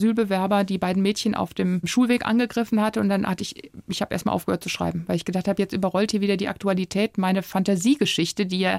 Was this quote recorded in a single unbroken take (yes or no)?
yes